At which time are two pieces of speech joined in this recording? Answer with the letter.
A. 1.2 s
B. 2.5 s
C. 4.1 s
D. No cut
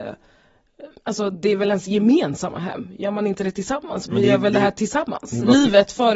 C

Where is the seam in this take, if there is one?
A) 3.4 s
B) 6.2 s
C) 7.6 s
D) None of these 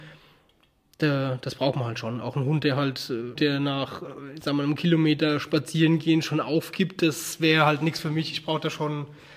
A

